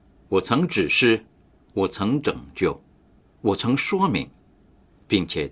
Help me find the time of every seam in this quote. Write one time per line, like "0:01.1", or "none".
none